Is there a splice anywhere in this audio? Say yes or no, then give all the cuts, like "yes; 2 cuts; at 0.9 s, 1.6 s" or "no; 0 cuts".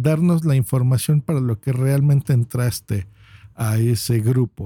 no; 0 cuts